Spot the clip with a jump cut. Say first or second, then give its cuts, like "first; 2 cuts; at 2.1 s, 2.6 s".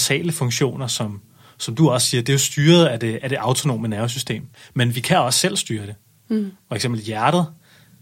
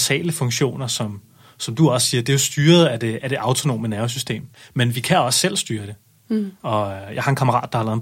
second; 1 cut; at 6.6 s